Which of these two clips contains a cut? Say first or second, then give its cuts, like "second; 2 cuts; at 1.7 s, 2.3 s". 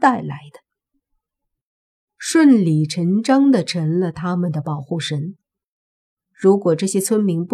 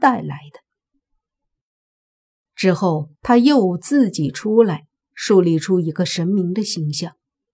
first; 1 cut; at 2.1 s